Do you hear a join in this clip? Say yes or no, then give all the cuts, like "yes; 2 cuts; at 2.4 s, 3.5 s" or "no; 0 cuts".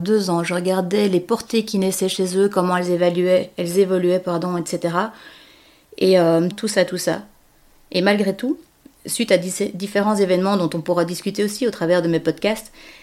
yes; 1 cut; at 6.5 s